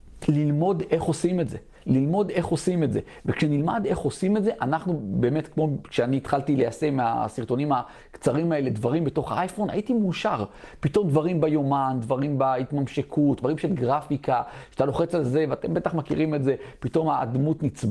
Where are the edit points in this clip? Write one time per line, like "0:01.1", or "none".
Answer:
0:13.4